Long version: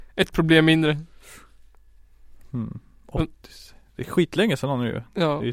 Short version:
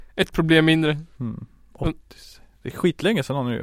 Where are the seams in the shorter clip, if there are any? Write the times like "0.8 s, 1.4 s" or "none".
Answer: 1.1 s